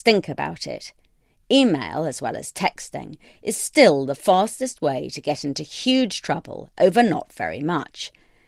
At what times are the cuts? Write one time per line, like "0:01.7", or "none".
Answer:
none